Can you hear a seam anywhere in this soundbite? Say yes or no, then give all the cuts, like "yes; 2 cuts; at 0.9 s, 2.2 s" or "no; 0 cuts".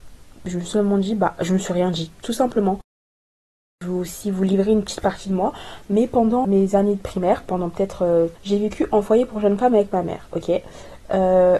yes; 2 cuts; at 6.4 s, 8.4 s